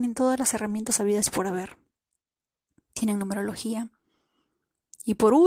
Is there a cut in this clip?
no; 0 cuts

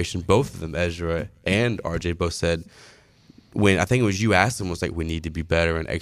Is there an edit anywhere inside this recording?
yes; 1 cut; at 4.9 s

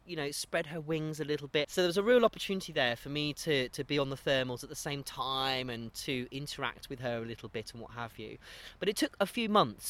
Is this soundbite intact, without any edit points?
no; 1 cut; at 1.6 s

